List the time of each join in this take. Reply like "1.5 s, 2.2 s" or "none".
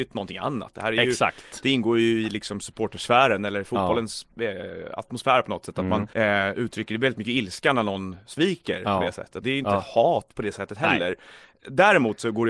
6.1 s, 9.4 s